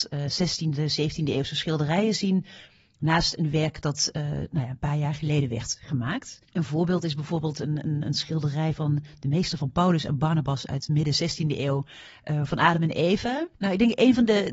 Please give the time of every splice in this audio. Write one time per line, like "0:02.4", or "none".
0:06.4
0:13.5

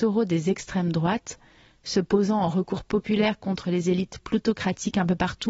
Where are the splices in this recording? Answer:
none

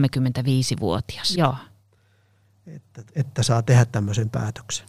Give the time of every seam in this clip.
0:01.3
0:03.1

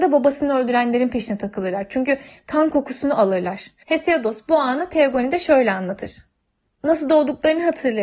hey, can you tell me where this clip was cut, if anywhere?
0:03.8
0:06.6

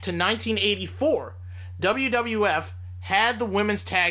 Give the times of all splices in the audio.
none

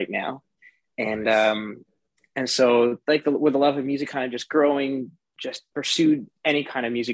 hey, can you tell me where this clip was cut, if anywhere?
none

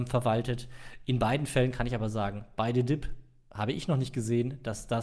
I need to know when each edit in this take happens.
none

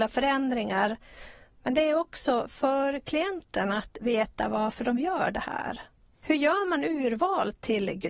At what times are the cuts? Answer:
none

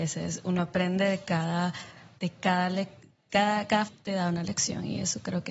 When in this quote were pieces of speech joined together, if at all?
0:02.2
0:03.8

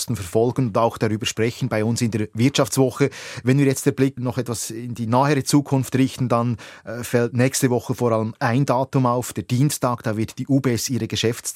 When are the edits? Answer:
0:04.2

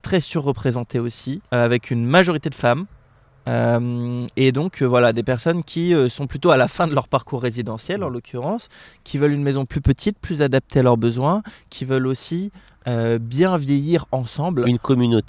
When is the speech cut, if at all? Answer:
0:01.5

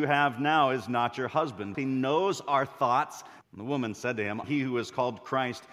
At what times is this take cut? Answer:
0:01.7
0:03.4
0:04.4

